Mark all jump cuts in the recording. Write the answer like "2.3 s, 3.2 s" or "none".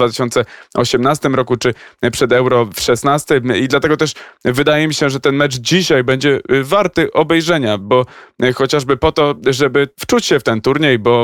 9.9 s